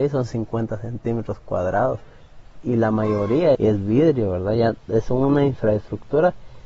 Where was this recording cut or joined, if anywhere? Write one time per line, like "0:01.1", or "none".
0:03.5